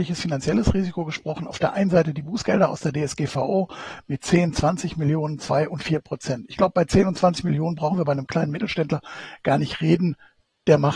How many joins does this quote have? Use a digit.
0